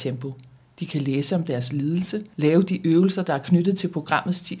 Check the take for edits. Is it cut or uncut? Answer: uncut